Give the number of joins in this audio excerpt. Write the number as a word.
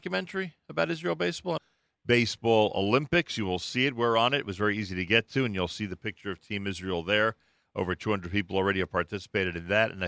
one